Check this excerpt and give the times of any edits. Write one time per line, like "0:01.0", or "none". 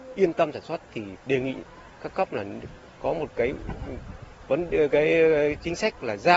none